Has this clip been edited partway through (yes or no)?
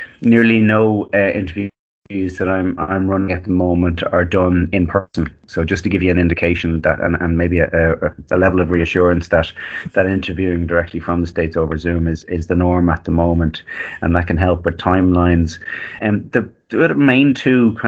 yes